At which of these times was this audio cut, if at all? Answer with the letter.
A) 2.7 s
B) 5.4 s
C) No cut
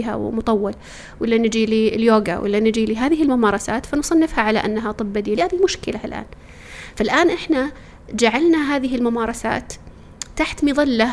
B